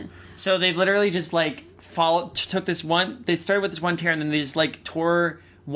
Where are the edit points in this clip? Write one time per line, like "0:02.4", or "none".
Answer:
none